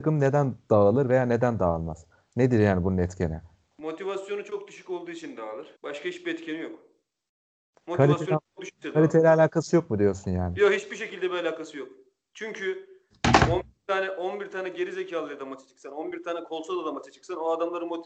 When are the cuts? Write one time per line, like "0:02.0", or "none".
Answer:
0:05.8